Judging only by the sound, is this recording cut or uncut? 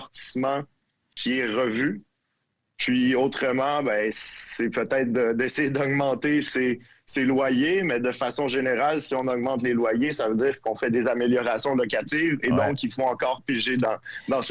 uncut